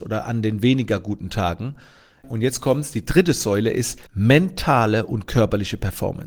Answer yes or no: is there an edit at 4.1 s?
yes